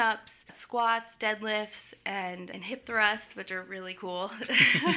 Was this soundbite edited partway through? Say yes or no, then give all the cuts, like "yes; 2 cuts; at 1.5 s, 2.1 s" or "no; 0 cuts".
no; 0 cuts